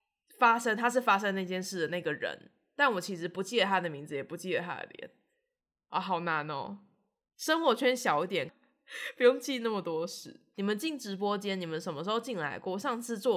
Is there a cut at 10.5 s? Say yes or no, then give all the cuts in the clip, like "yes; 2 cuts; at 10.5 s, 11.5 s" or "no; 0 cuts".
yes; 2 cuts; at 8.5 s, 10.5 s